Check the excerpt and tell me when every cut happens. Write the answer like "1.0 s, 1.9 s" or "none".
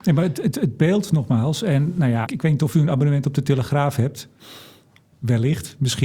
2.3 s